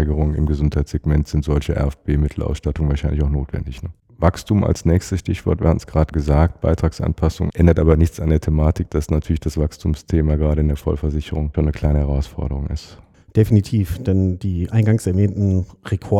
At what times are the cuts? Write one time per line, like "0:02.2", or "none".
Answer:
0:04.0
0:07.5